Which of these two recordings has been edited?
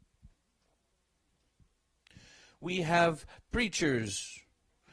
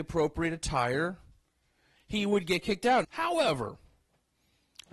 second; 1 cut; at 3.0 s

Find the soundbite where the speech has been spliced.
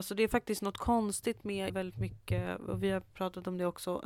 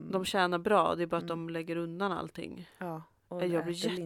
first; 1 cut; at 1.7 s

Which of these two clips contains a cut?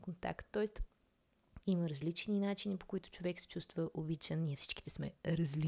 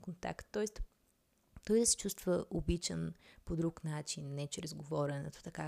first; 1 cut; at 1.6 s

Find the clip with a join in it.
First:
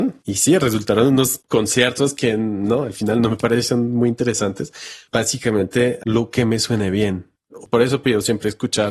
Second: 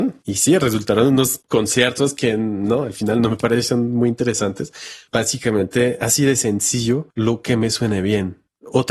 first; 2 cuts; at 6.0 s, 7.6 s

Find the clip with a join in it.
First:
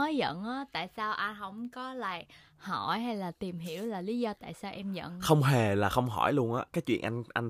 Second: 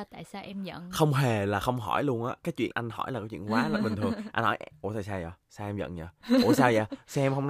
second; 1 cut; at 2.7 s

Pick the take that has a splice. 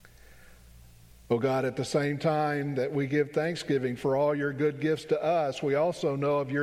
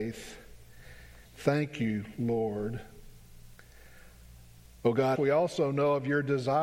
second; 2 cuts; at 1.3 s, 5.2 s

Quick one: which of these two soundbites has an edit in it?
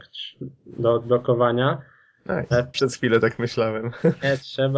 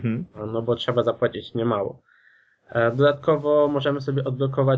first; 1 cut; at 2.7 s

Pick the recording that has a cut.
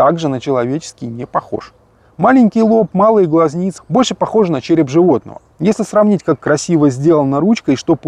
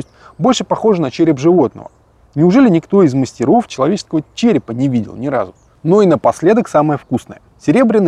first; 2 cuts; at 3.8 s, 5.5 s

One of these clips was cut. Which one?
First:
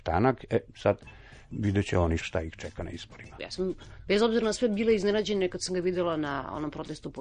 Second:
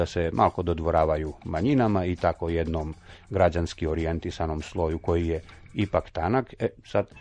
first; 2 cuts; at 2.2 s, 3.4 s

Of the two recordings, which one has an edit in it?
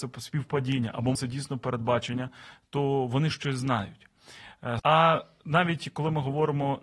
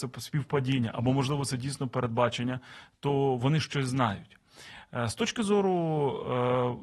first; 2 cuts; at 1.2 s, 4.8 s

